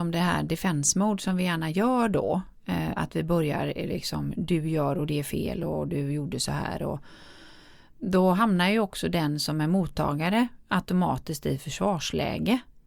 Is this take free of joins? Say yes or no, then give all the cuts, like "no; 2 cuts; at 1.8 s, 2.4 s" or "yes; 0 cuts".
yes; 0 cuts